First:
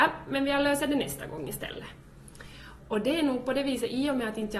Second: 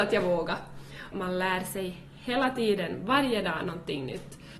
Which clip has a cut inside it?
second; 1 cut; at 1.1 s

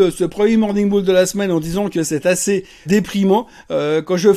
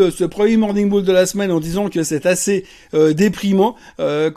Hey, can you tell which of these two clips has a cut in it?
first; 1 cut; at 2.9 s

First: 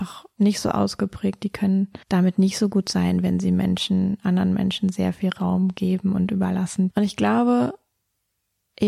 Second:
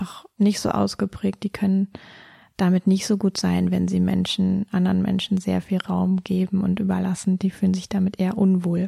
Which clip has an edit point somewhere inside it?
first; 2 cuts; at 2.0 s, 6.9 s

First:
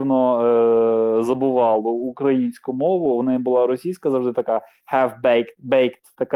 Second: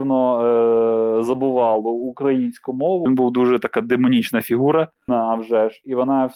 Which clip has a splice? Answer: second; 2 cuts; at 3.1 s, 5.1 s

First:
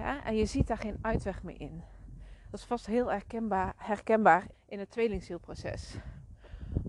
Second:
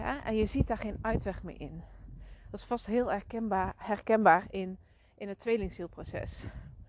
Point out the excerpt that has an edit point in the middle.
first; 1 cut; at 4.5 s

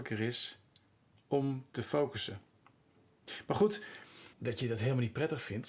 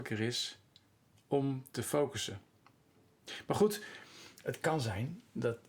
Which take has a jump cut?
first; 1 cut; at 4.3 s

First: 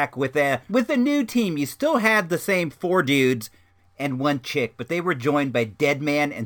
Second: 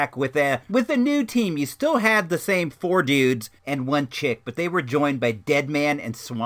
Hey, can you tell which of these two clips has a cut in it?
second; 1 cut; at 3.6 s

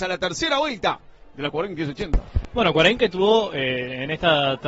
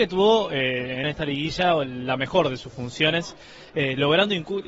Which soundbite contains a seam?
second; 1 cut; at 1.0 s

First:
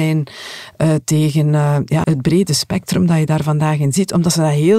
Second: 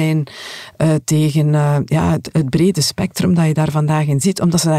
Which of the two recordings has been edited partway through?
first; 1 cut; at 2.0 s

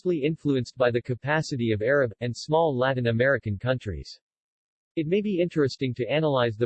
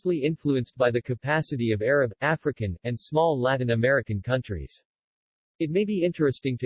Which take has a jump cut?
first; 1 cut; at 2.2 s

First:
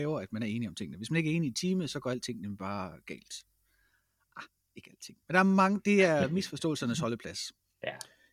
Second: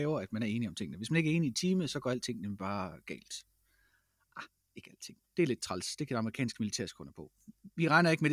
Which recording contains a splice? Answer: second; 1 cut; at 5.2 s

